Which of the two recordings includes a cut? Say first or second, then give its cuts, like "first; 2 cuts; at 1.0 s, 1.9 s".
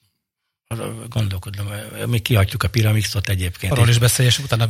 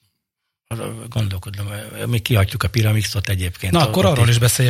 first; 1 cut; at 3.7 s